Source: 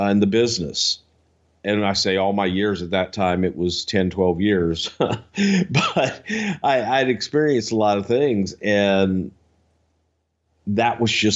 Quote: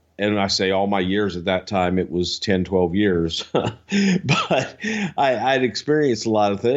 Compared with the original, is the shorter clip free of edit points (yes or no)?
yes